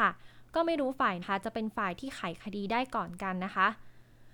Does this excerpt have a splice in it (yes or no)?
yes